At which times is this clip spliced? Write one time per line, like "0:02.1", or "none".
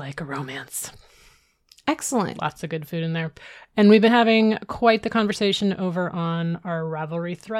none